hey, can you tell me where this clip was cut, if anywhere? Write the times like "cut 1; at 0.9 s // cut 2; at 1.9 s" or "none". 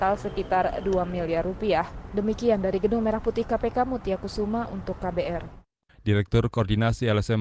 cut 1; at 5.9 s